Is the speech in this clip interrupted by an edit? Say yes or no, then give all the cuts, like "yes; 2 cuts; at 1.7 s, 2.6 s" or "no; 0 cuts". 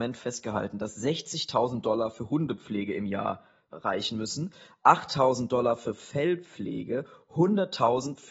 no; 0 cuts